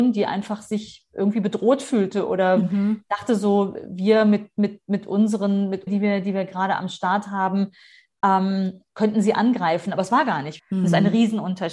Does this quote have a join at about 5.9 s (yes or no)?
yes